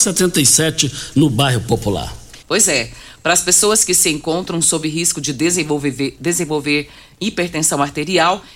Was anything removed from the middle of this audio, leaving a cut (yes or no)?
yes